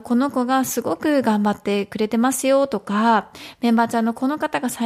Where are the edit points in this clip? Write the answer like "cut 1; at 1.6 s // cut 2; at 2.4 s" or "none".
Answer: none